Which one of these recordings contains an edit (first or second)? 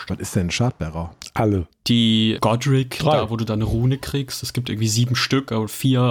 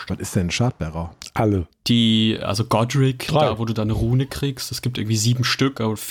first